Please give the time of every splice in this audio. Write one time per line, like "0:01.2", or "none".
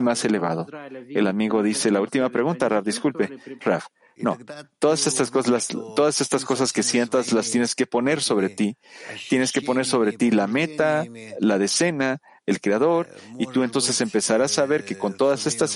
0:03.6